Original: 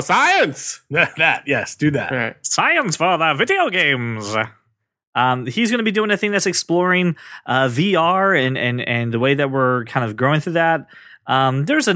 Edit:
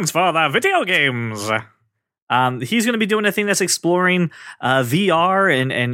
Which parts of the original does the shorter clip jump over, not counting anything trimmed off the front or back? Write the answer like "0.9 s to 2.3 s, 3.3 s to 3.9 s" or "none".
none